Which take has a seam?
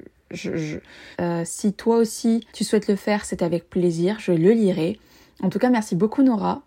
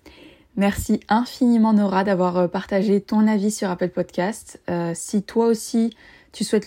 first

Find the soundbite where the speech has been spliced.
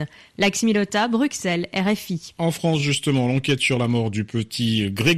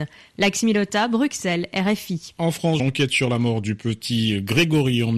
second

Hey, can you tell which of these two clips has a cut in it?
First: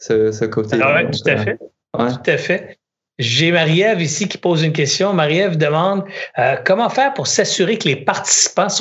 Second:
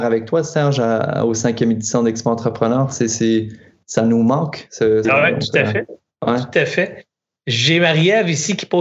second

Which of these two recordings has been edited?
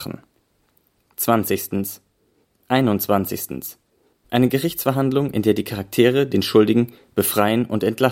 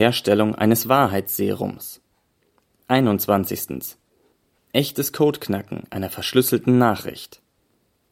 first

